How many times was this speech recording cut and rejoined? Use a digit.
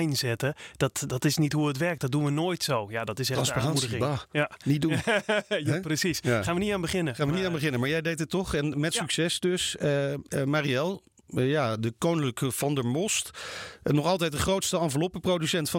0